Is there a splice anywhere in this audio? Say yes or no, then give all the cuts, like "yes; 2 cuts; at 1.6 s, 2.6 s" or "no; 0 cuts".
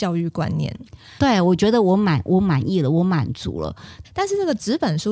yes; 2 cuts; at 1.2 s, 4.0 s